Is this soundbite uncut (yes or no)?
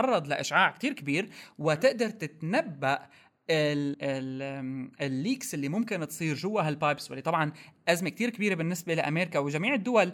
no